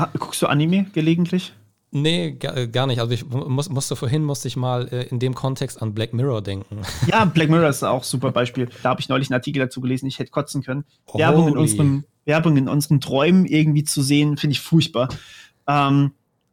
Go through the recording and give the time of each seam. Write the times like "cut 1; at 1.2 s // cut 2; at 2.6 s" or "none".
cut 1; at 8.8 s